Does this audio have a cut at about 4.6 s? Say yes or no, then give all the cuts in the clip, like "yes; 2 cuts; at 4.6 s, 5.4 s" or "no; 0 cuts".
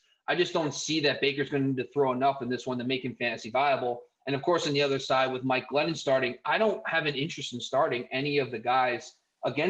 no; 0 cuts